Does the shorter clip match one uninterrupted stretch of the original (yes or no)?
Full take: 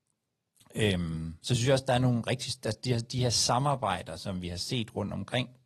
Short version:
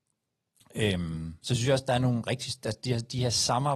yes